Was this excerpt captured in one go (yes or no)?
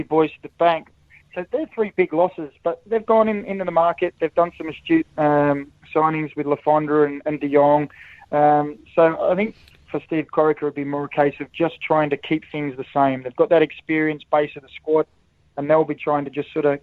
yes